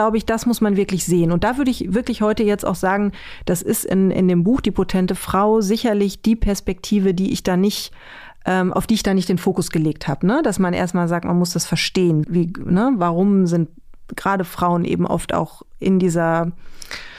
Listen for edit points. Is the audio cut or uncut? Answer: cut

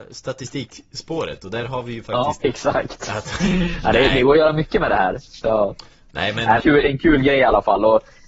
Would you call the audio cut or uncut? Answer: cut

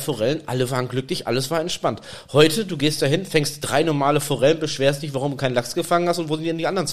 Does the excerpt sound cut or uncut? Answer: uncut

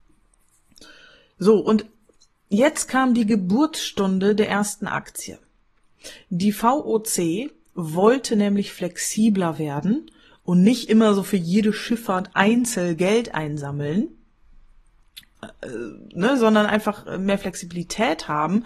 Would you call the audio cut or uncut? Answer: uncut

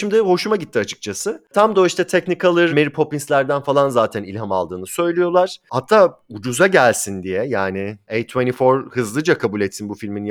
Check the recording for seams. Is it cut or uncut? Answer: cut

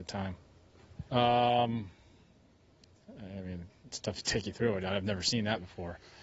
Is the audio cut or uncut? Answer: cut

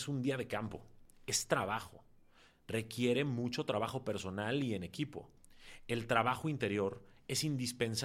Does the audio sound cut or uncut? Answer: uncut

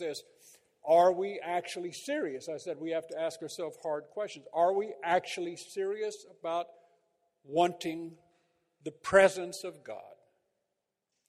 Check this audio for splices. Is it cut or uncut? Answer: uncut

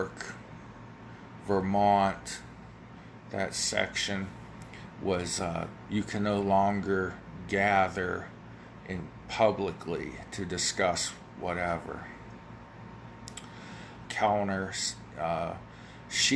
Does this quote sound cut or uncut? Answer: cut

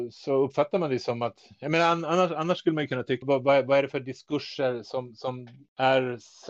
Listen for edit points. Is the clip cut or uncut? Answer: cut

